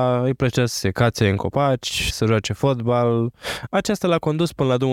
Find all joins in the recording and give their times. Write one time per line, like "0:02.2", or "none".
0:02.1
0:03.7